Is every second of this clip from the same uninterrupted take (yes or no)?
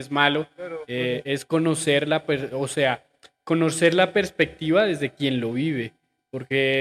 yes